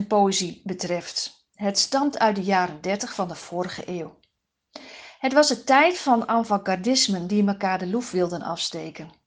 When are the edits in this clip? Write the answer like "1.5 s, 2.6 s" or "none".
none